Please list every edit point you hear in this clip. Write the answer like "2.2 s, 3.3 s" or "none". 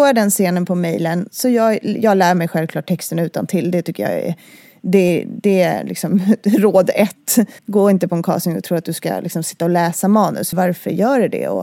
7.6 s, 10.5 s